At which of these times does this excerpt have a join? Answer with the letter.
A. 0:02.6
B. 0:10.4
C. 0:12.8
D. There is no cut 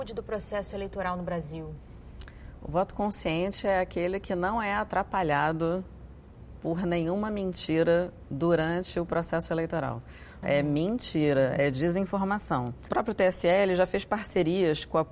B